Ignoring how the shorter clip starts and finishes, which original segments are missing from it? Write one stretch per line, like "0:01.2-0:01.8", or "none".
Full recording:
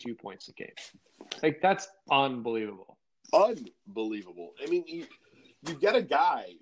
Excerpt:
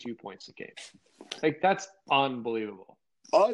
none